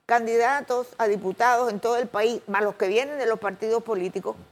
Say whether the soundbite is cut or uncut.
uncut